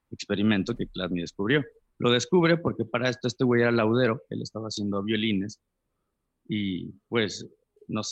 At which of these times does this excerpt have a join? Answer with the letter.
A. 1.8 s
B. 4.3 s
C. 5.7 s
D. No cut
D